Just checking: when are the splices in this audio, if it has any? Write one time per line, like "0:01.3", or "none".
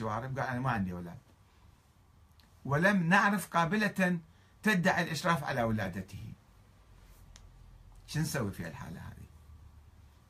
none